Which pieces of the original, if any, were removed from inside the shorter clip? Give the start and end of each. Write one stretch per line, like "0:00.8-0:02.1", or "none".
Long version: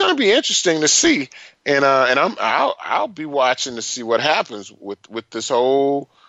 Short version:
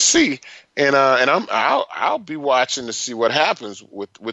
none